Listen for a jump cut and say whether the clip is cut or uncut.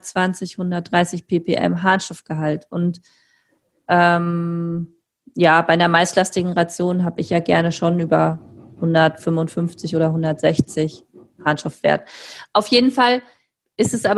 uncut